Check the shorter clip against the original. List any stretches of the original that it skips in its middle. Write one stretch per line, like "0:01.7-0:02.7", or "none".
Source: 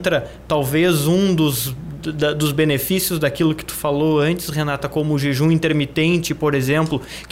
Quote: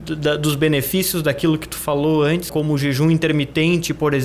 0:04.5-0:04.9